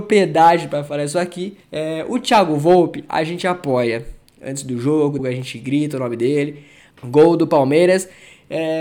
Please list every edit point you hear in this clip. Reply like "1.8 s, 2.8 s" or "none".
1.6 s, 5.2 s, 6.9 s